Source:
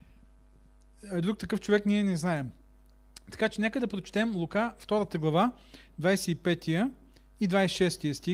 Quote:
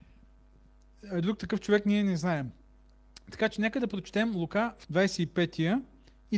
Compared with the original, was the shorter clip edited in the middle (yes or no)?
yes